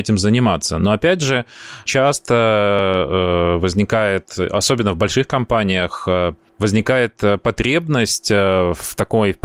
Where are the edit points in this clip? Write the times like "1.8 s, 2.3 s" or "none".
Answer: 1.9 s